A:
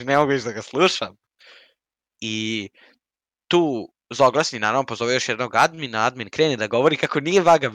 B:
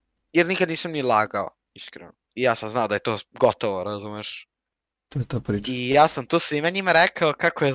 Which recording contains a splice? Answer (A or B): B